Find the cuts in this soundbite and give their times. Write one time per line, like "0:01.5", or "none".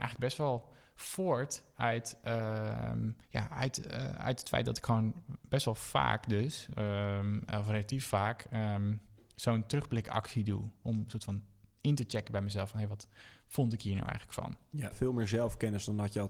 0:03.2
0:14.9